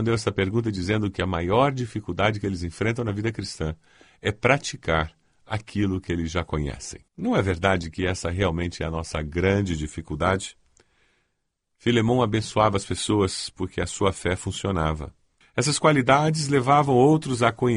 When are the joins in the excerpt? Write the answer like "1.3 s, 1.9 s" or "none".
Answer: 7.1 s, 15.4 s